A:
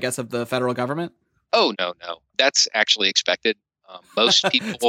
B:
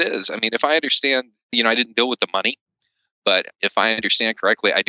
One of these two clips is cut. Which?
A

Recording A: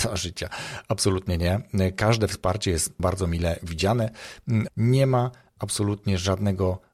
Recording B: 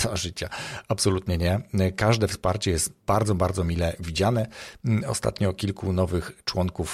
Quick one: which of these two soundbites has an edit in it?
A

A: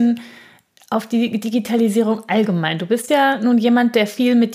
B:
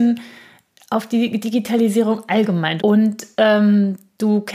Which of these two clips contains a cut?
B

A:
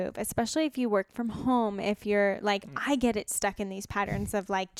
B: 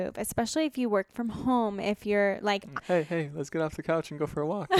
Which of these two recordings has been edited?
B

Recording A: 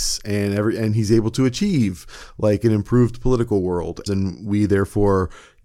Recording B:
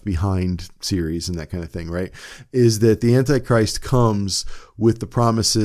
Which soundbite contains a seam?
A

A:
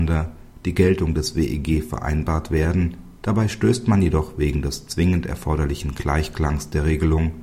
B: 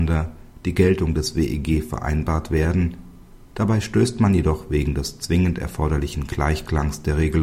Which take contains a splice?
A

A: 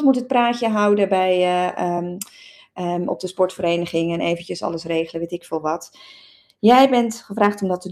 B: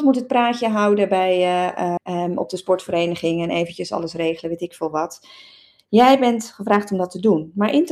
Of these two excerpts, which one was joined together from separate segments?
B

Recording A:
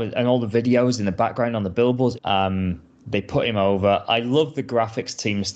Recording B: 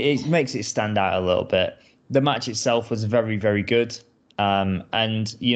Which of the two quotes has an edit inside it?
A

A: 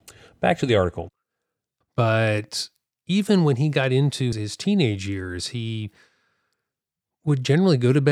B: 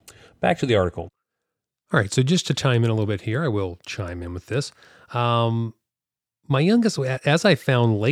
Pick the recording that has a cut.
A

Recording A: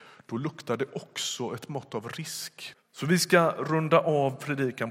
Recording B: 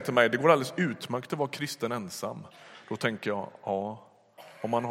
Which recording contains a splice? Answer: A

